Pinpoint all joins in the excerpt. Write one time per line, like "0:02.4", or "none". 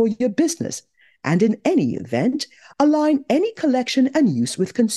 none